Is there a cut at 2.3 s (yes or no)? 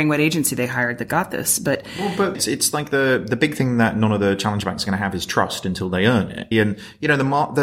yes